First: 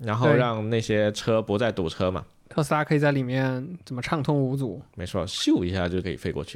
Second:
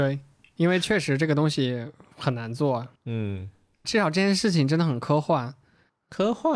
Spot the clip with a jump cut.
second; 1 cut; at 3.0 s

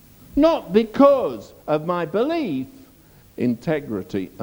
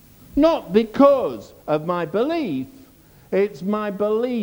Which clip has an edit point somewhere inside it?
first; 1 cut; at 3.2 s

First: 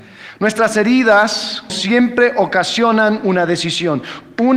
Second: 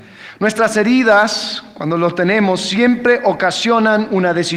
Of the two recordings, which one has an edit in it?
first; 1 cut; at 1.7 s

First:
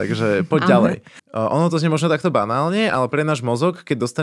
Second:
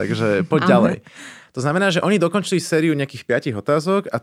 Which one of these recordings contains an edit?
first; 1 cut; at 1.2 s

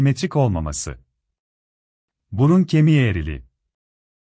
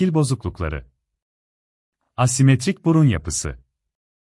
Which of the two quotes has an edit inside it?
first; 1 cut; at 2.2 s

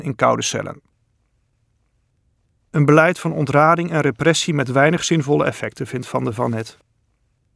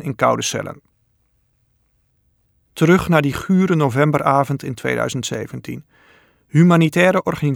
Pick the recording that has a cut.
first; 1 cut; at 2.5 s

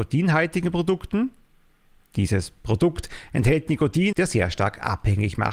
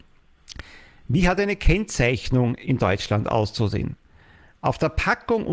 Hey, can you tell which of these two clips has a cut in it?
first; 1 cut; at 4.1 s

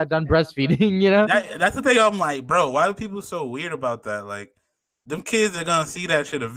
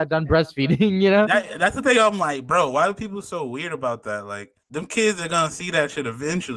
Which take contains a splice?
second; 1 cut; at 4.6 s

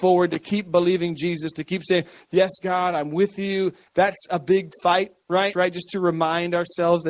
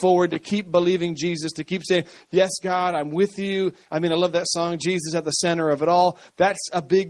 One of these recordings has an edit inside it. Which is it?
first; 2 cuts; at 3.9 s, 5.5 s

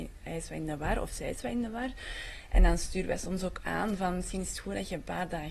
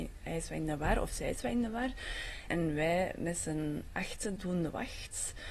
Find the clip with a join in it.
second; 2 cuts; at 2.5 s, 4.4 s

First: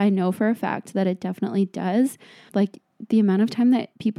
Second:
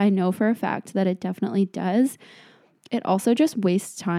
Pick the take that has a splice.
first; 1 cut; at 2.5 s

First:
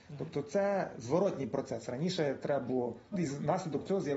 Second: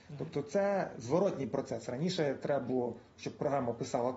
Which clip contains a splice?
first; 1 cut; at 3.1 s

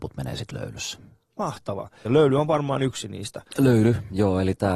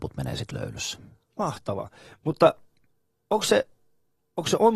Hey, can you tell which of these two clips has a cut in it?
first; 1 cut; at 2.1 s

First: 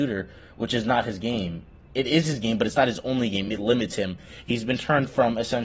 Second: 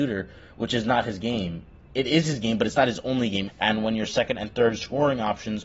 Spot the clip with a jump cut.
second; 1 cut; at 3.5 s

